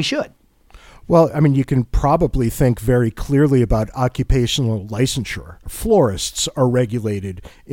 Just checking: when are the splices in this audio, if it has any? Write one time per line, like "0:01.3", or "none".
0:05.7